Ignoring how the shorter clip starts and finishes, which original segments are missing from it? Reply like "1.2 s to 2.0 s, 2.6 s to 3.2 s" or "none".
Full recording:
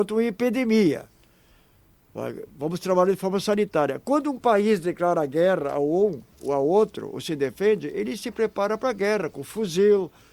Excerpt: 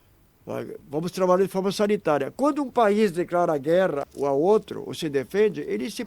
5.7 s to 6.3 s